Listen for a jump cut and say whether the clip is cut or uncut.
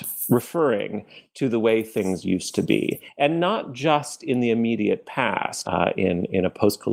cut